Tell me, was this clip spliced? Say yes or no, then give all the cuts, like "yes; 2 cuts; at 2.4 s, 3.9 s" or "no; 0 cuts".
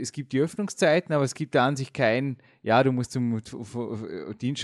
no; 0 cuts